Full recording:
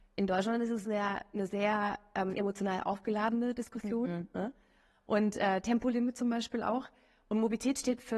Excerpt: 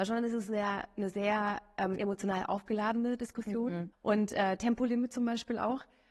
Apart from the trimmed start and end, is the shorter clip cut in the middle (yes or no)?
yes